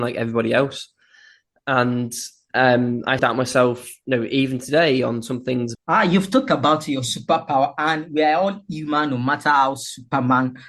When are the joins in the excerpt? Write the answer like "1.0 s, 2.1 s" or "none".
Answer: 3.2 s, 5.7 s